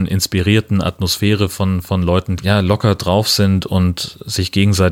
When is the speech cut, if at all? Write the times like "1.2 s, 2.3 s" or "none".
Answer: 2.4 s